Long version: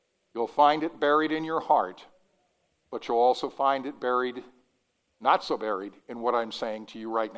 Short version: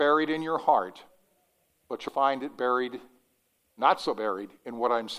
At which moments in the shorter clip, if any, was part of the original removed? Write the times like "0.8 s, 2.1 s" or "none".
2.1 s